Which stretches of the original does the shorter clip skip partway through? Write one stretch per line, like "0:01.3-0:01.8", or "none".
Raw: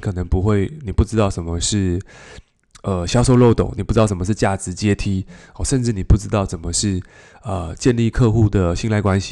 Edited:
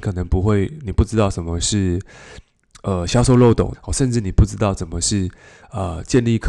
0:03.7-0:05.5